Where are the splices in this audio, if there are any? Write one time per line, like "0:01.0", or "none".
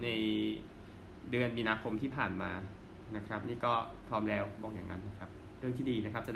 0:05.0